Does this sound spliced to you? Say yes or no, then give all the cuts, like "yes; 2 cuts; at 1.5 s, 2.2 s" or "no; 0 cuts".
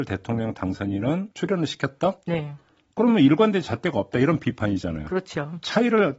yes; 1 cut; at 1.3 s